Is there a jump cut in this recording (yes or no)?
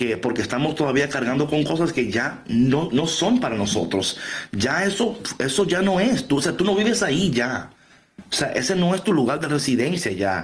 no